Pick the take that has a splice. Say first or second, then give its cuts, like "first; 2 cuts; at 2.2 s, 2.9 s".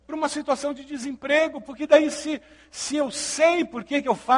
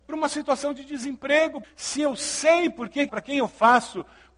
second; 2 cuts; at 1.6 s, 3.1 s